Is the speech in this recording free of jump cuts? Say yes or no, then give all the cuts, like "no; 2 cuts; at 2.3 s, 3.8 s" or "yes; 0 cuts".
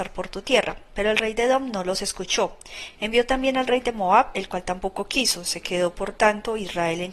yes; 0 cuts